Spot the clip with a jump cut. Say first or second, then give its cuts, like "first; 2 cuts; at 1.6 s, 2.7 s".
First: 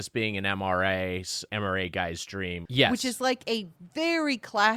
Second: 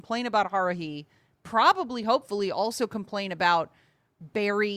first; 2 cuts; at 1.5 s, 2.7 s